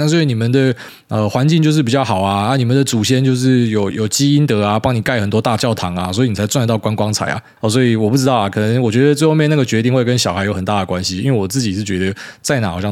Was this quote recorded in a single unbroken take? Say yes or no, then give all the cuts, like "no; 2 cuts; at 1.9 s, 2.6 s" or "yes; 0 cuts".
no; 2 cuts; at 3.9 s, 7.6 s